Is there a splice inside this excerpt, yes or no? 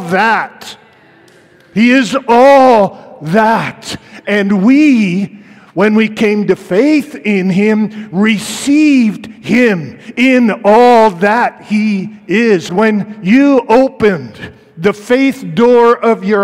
yes